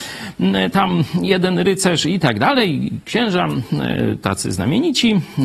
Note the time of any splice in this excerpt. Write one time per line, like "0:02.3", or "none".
none